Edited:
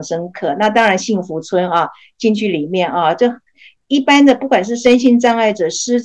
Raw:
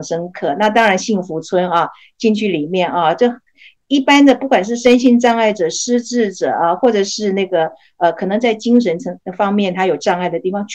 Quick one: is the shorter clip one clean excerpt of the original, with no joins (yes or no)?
yes